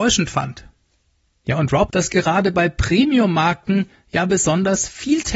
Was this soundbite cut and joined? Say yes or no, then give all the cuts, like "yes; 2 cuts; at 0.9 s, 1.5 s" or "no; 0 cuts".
yes; 1 cut; at 1.9 s